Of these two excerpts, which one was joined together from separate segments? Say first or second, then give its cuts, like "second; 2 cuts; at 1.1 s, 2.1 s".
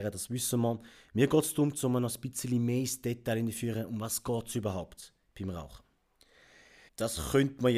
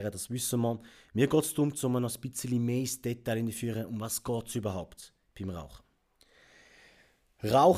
first; 1 cut; at 6.9 s